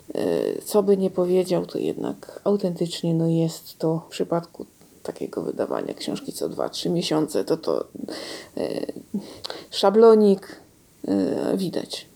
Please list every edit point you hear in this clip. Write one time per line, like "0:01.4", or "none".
none

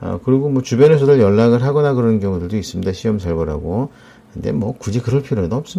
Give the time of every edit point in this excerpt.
none

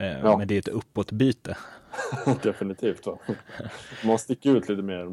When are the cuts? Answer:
none

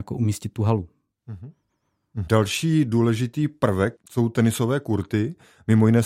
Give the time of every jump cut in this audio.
0:02.3
0:04.0

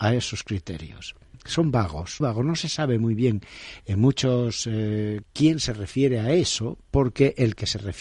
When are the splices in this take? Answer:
0:02.2
0:05.2

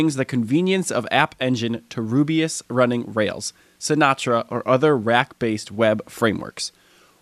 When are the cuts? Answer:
none

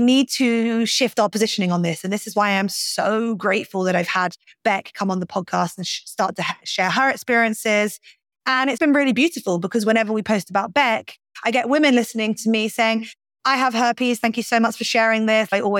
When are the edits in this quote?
0:08.8

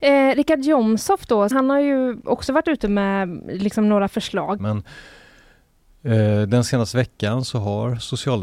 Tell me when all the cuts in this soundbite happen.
0:01.5
0:04.6

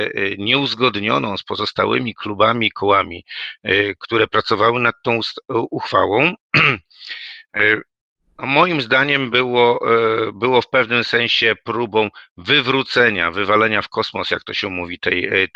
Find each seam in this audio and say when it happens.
none

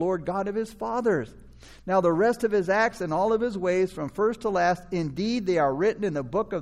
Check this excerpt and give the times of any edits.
none

